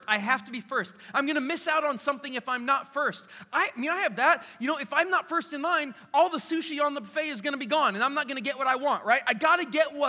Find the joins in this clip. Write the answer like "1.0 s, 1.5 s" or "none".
none